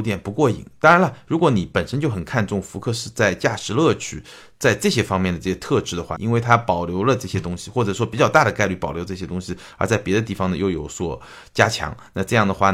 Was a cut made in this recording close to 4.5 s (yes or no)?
no